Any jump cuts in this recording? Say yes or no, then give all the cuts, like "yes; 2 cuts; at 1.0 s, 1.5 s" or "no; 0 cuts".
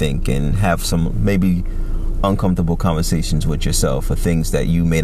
no; 0 cuts